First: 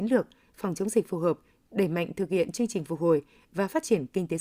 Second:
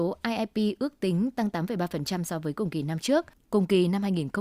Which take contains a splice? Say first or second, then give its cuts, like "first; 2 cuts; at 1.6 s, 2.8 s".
second; 1 cut; at 3.3 s